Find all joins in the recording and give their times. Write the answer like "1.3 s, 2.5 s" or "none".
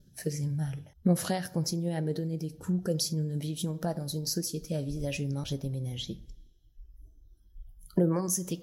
0.9 s, 5.4 s